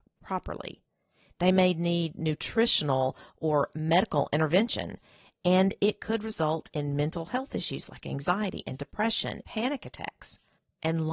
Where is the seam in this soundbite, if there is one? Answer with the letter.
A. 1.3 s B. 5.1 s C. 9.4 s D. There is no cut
C